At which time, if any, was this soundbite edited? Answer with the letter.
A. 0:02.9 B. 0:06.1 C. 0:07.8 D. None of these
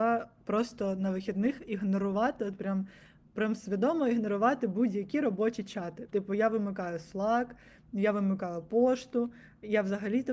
D